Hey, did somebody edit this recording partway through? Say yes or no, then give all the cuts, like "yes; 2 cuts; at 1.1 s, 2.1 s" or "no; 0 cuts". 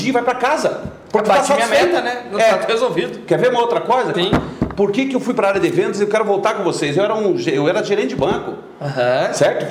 yes; 1 cut; at 4.1 s